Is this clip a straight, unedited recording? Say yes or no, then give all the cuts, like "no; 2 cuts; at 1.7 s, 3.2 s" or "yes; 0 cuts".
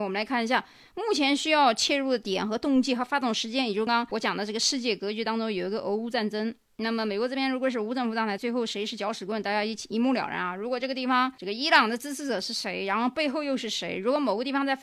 no; 2 cuts; at 3.9 s, 8.4 s